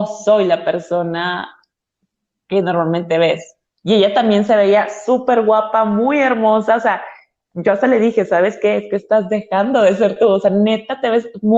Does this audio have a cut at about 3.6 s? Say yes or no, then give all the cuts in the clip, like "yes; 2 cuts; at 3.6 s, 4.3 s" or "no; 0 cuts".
no; 0 cuts